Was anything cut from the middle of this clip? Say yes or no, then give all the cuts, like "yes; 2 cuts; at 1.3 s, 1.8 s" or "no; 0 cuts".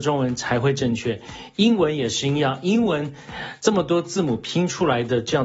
no; 0 cuts